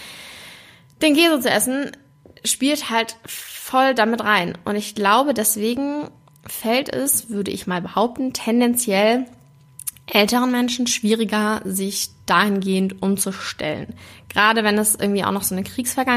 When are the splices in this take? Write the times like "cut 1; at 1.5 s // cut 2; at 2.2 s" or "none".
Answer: none